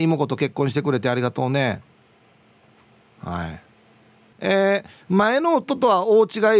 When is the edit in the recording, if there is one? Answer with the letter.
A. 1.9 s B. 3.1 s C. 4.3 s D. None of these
C